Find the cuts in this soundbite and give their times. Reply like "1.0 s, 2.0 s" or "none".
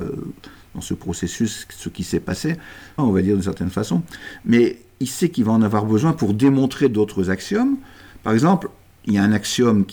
3.0 s